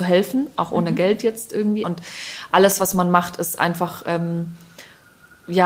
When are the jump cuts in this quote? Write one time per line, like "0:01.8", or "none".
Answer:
0:01.8

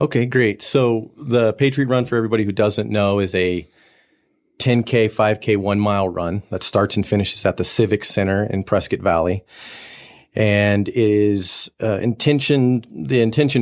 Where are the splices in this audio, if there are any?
none

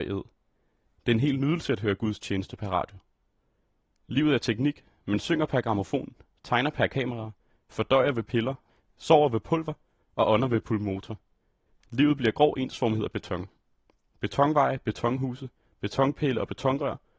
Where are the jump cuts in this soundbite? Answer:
none

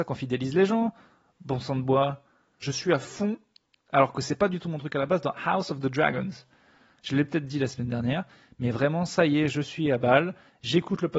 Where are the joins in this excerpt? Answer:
0:02.6

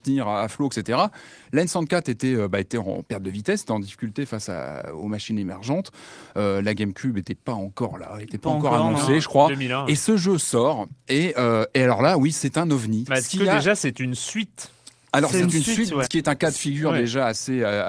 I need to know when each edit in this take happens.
0:13.1
0:16.0

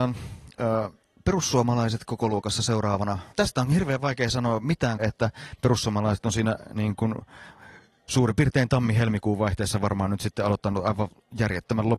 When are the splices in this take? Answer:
0:03.3
0:05.0

